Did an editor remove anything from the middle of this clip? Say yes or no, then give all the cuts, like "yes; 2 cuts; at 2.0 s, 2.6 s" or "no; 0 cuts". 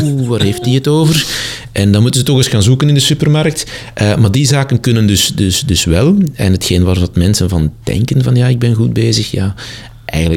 no; 0 cuts